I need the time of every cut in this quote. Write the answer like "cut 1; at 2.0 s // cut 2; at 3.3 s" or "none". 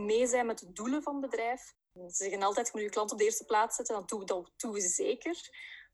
cut 1; at 1.7 s